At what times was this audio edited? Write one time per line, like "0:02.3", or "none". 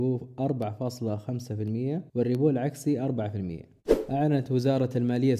0:02.1

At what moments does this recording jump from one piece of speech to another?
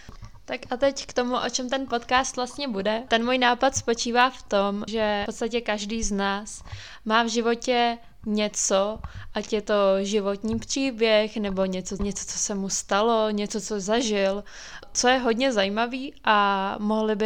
0:03.1
0:04.9
0:12.0

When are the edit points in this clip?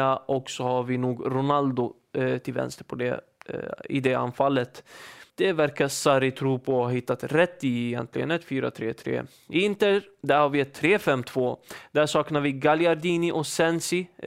0:05.3

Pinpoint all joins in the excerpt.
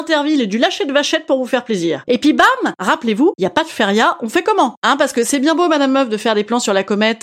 0:02.0
0:03.3

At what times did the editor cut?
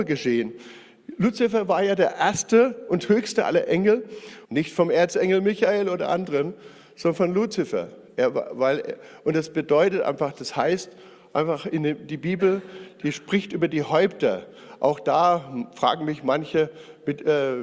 0:04.4

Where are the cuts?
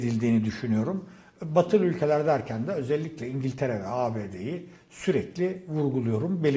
none

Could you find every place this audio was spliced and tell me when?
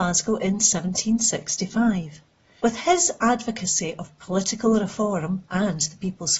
0:02.6

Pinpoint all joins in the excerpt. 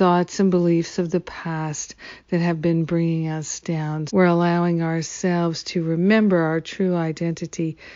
0:04.1

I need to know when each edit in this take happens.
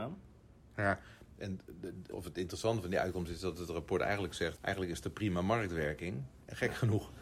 0:02.1
0:04.6

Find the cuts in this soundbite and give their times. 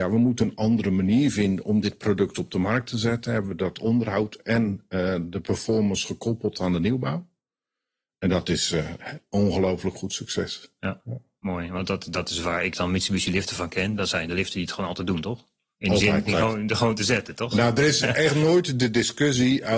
0:16.3

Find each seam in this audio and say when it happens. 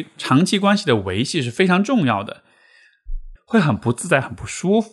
0:03.4

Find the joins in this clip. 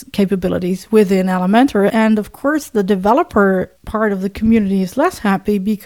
0:01.9
0:03.8

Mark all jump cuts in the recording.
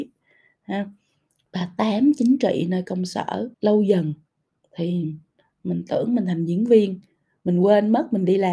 0:01.5
0:03.5

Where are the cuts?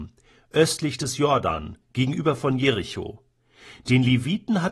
none

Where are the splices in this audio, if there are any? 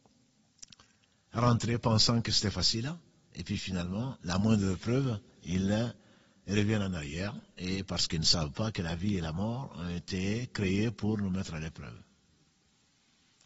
none

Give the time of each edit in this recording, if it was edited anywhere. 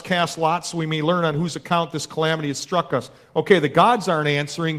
none

